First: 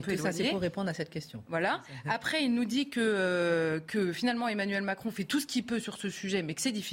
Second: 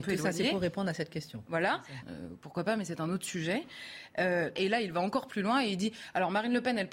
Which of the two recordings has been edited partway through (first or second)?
second